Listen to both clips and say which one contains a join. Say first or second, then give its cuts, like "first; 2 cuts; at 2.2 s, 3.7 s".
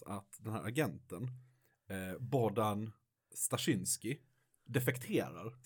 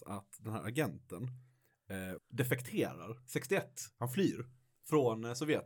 second; 1 cut; at 2.2 s